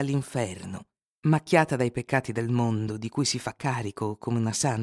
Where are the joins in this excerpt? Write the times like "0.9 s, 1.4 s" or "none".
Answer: 1.2 s